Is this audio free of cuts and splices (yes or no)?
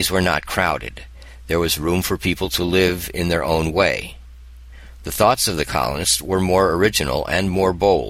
yes